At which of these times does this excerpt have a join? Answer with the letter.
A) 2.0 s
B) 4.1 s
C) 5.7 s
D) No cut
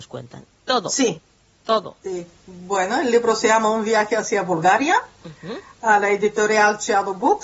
A